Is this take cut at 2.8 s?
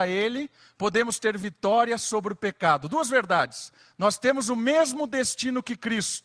no; 0 cuts

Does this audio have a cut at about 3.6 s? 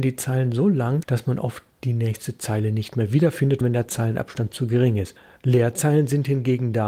yes; 2 cuts; at 3.6 s, 5.4 s

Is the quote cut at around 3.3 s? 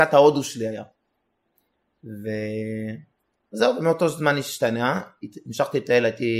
no; 0 cuts

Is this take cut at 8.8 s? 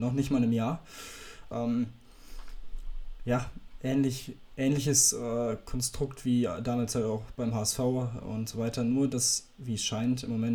no; 1 cut; at 1.5 s

